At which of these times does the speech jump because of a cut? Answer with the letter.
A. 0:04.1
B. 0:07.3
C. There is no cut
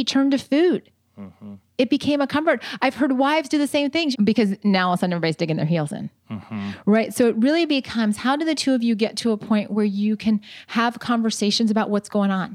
A